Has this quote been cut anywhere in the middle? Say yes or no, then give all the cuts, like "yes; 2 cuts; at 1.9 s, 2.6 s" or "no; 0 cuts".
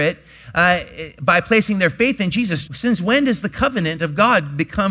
yes; 1 cut; at 2.7 s